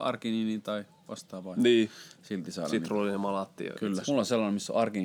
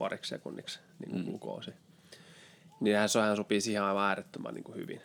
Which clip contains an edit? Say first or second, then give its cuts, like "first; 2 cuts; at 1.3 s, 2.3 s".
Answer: first; 1 cut; at 4.0 s